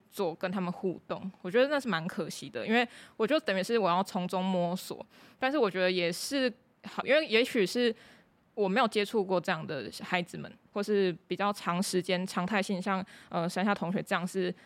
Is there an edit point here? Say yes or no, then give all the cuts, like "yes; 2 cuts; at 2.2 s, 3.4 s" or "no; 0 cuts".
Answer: yes; 2 cuts; at 7.0 s, 10.7 s